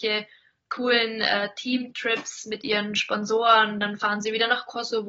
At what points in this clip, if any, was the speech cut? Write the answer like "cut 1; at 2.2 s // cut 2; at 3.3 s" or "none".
none